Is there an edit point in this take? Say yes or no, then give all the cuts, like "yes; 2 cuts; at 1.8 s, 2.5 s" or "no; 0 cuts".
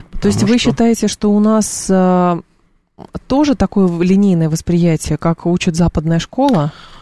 no; 0 cuts